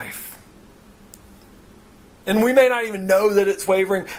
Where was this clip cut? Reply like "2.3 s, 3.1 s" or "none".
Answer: 2.1 s